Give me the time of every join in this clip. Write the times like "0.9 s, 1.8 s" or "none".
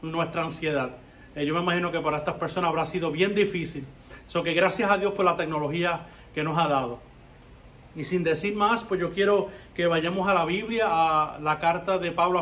none